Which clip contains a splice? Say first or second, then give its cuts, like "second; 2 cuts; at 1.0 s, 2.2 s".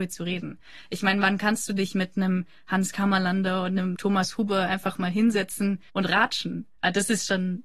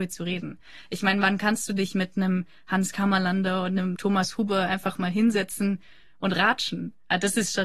first; 1 cut; at 5.9 s